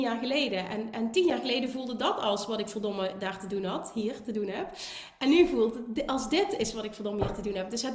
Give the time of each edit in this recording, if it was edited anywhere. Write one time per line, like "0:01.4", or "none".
none